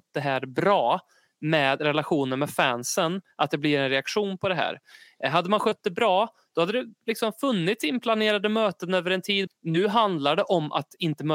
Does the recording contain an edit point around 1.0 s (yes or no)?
no